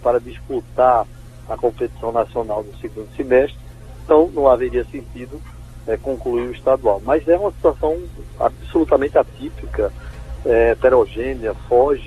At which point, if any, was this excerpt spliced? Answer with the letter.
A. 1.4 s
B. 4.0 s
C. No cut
C